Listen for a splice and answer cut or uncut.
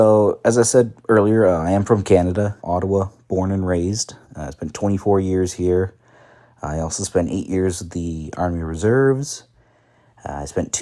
cut